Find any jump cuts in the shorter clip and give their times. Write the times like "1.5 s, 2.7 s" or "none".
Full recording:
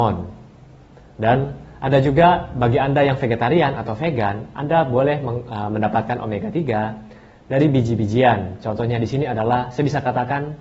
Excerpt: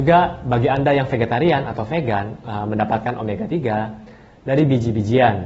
2.4 s